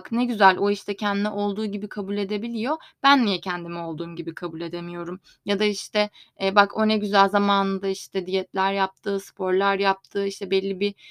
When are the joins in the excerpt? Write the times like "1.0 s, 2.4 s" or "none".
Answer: none